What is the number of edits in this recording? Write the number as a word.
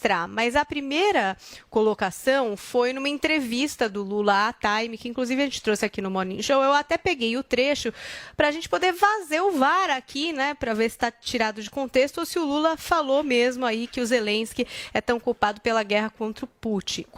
zero